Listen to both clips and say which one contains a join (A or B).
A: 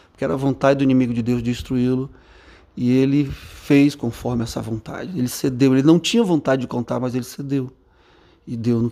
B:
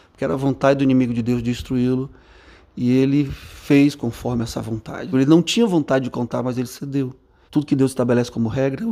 B